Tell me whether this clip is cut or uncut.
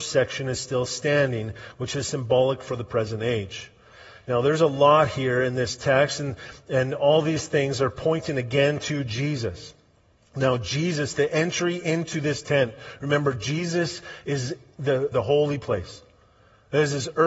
cut